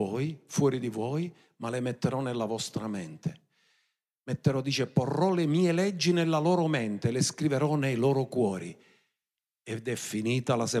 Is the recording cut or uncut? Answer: uncut